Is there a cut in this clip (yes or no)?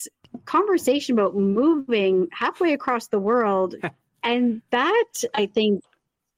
yes